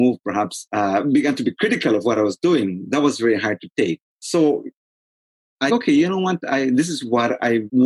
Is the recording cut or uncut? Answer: cut